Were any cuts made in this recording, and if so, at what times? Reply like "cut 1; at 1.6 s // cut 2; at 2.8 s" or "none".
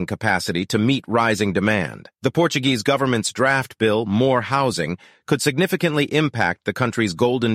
cut 1; at 2.1 s